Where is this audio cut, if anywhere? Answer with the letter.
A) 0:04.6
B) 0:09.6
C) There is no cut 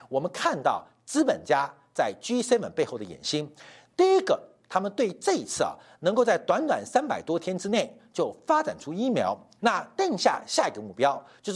B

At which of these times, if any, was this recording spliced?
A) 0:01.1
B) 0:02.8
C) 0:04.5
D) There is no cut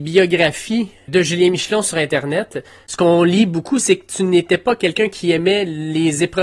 A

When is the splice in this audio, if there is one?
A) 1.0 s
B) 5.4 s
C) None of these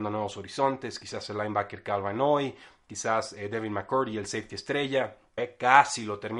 B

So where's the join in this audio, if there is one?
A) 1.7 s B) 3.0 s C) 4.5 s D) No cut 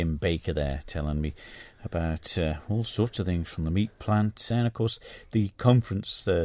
C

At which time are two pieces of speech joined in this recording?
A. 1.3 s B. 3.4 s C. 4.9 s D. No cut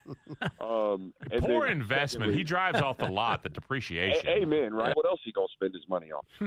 C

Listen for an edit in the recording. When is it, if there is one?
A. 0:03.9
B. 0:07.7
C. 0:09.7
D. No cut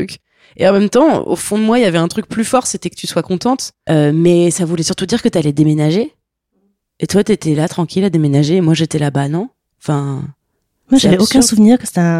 A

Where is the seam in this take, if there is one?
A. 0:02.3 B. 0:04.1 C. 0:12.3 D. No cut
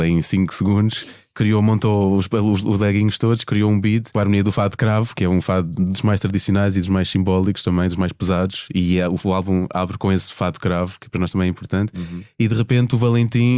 B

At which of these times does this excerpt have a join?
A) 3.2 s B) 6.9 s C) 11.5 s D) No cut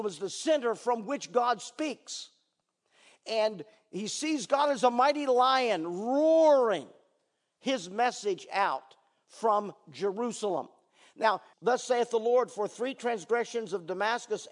C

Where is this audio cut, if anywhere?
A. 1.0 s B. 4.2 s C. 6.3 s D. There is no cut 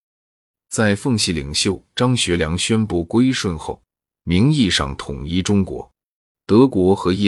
C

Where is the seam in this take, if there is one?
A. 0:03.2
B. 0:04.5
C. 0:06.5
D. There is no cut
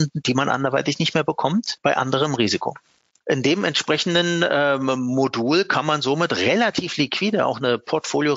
A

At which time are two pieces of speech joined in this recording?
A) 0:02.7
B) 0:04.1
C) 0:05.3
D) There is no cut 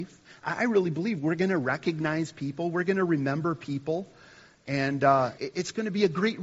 C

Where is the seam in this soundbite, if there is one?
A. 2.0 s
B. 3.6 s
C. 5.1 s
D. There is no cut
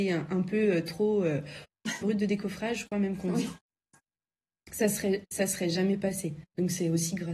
A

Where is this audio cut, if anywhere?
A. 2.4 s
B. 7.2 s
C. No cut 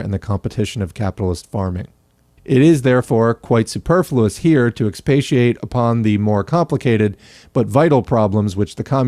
A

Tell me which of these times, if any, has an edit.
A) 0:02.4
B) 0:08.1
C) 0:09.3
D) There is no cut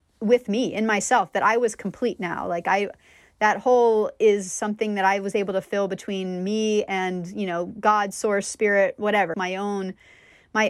C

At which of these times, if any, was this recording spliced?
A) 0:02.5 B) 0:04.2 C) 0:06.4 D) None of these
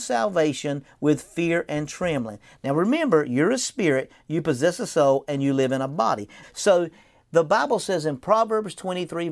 C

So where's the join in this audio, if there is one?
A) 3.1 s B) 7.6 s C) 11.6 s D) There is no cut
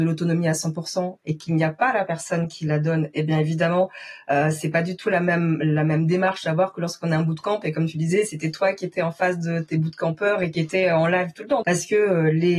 C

